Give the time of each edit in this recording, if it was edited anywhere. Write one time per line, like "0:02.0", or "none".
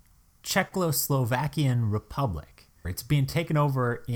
0:02.8

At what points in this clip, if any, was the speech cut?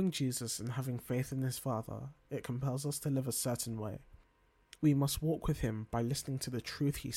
0:04.8

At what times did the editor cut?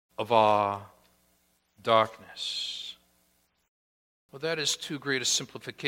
0:04.3

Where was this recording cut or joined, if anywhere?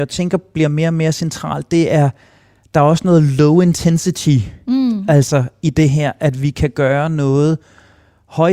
none

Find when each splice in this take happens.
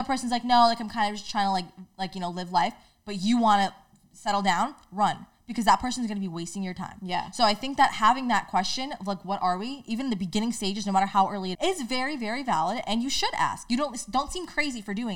0:11.5

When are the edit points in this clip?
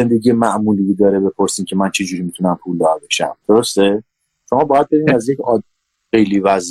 0:03.4

